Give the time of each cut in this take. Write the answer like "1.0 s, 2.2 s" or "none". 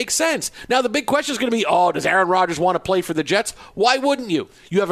none